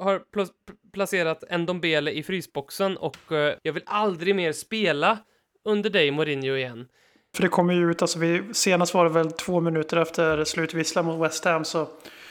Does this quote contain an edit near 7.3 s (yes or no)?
yes